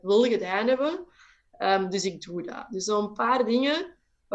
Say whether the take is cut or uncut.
uncut